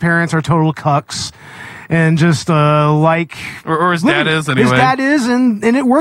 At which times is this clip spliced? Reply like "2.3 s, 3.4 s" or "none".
none